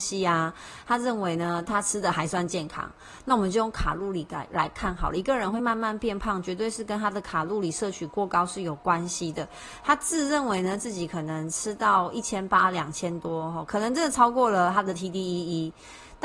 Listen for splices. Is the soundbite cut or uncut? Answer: uncut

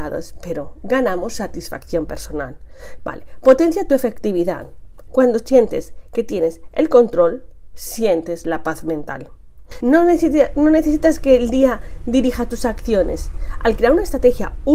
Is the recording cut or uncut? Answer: cut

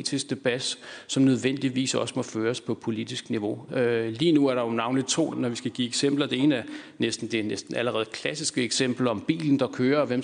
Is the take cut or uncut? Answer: cut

